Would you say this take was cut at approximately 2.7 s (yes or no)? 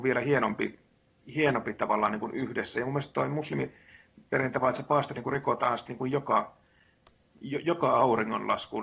no